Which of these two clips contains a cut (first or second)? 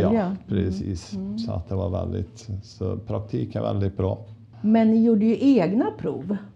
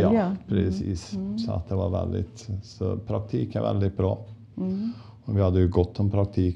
first